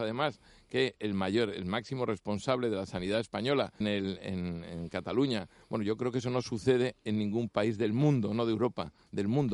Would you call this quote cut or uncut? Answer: cut